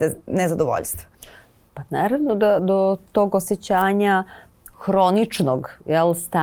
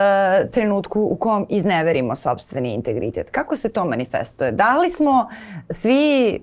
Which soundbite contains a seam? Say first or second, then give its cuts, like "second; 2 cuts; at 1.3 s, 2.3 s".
first; 1 cut; at 2.6 s